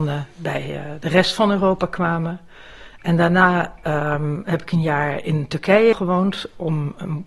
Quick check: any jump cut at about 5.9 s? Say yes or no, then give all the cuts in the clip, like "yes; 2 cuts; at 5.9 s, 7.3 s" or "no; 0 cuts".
yes; 1 cut; at 5.9 s